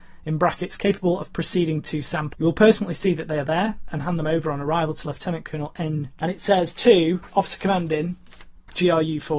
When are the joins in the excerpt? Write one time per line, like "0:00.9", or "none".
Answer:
0:02.3
0:06.2